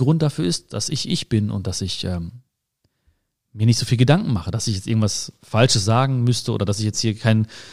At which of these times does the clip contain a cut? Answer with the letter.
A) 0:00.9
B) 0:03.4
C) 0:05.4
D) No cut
D